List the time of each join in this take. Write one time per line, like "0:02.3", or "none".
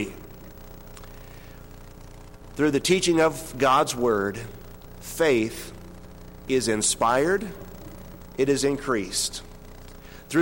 none